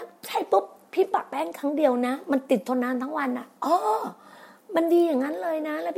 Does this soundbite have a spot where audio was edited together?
yes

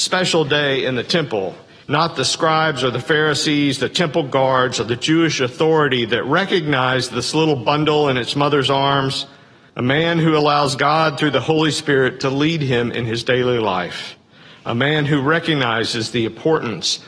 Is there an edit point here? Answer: yes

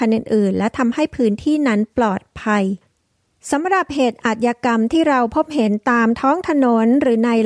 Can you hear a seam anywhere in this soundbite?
no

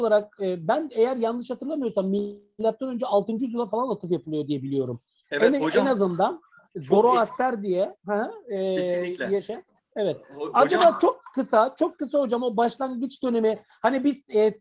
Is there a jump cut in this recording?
no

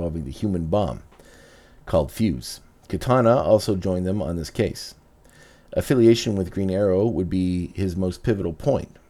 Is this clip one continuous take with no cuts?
yes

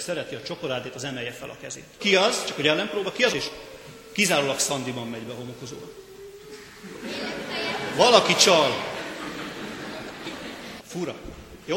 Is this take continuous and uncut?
no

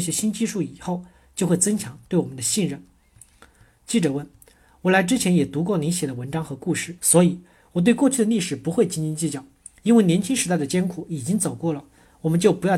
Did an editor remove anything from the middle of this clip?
yes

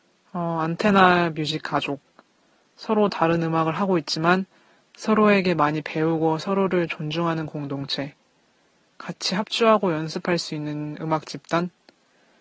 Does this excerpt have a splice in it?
no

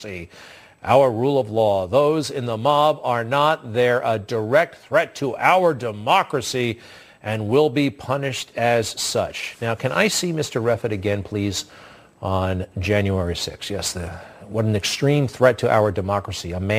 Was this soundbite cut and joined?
no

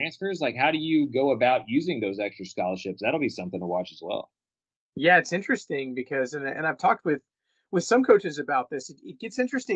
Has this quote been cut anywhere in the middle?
no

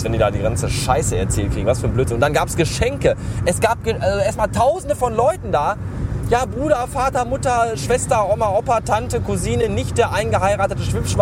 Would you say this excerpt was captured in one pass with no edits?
yes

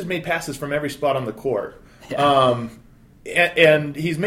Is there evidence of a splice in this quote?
no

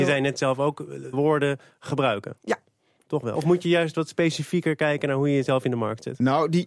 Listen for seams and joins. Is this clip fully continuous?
no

